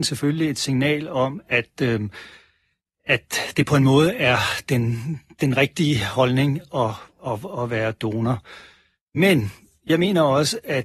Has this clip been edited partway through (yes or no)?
no